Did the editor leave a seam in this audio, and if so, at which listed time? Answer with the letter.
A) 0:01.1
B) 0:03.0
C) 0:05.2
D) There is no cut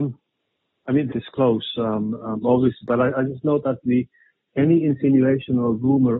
A